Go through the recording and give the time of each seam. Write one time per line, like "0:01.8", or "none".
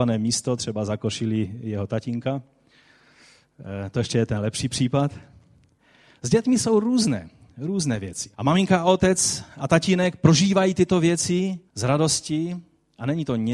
0:08.3
0:11.7